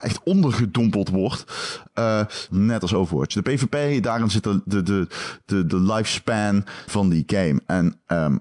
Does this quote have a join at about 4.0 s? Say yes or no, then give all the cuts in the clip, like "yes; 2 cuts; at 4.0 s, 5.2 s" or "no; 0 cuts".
no; 2 cuts; at 2.5 s, 6.9 s